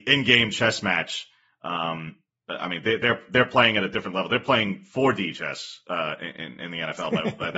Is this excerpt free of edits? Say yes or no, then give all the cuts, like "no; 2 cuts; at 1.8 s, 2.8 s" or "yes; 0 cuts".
yes; 0 cuts